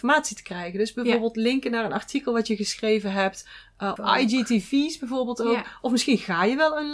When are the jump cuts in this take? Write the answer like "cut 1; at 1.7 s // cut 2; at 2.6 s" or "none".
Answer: cut 1; at 4.0 s